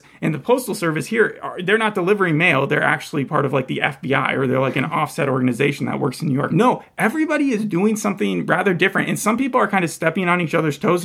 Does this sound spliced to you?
yes; 1 cut; at 6.5 s

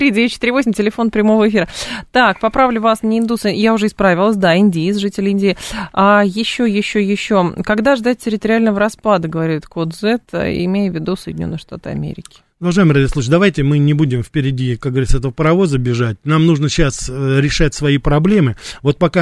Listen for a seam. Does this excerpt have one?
no; 0 cuts

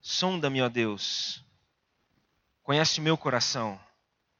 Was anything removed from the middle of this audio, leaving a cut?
no; 0 cuts

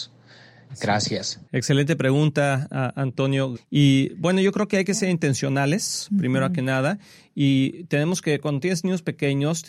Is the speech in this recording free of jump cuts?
no; 2 cuts; at 1.5 s, 3.6 s

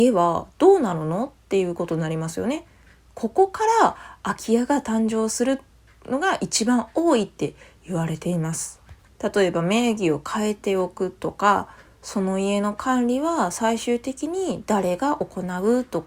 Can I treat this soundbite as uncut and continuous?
no; 1 cut; at 9.1 s

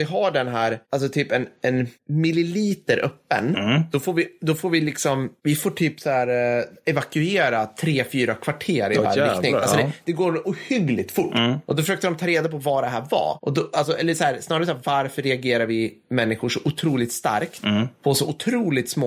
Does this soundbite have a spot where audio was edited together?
no; 0 cuts

